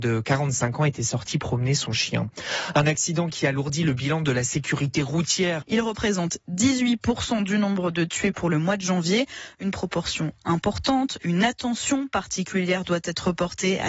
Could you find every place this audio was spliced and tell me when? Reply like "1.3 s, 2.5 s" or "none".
5.6 s